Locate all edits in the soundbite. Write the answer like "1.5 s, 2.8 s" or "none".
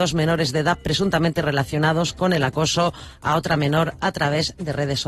none